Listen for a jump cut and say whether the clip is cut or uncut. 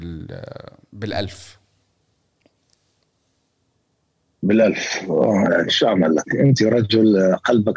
cut